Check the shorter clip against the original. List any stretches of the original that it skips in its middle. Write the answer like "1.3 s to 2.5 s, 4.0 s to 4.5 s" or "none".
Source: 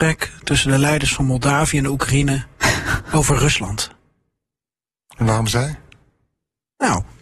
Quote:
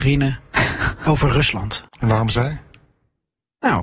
4.0 s to 5.1 s